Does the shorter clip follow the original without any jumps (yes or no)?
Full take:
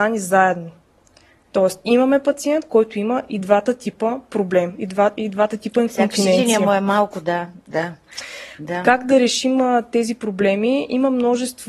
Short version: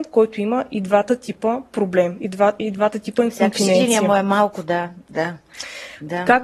yes